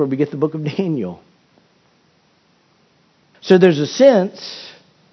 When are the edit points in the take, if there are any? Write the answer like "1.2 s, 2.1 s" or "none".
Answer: 3.3 s